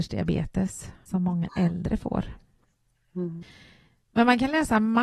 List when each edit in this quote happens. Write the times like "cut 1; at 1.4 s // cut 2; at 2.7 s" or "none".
cut 1; at 1.1 s